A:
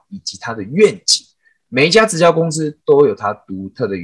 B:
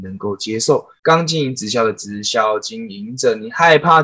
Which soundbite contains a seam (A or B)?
B